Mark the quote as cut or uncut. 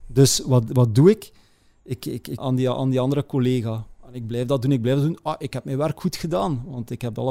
cut